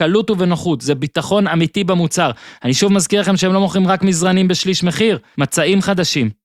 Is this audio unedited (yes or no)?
no